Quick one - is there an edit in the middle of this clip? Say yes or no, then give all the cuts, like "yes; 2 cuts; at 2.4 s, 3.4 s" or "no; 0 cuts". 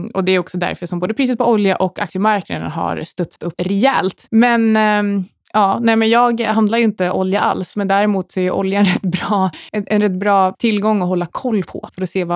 no; 0 cuts